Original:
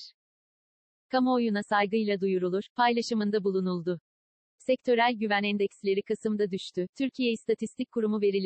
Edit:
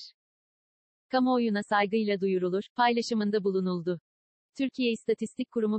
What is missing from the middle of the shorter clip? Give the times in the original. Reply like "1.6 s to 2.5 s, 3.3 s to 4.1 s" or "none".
4.5 s to 6.9 s